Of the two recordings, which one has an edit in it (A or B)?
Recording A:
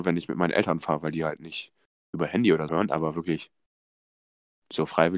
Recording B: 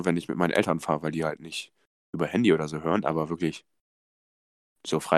A